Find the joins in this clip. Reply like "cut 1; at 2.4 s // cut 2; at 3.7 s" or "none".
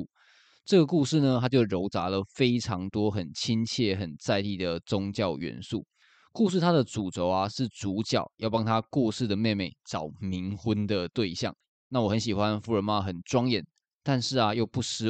cut 1; at 11.7 s